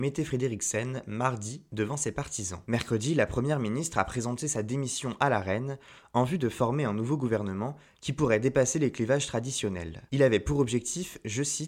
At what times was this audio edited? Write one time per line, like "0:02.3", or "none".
0:02.6
0:10.1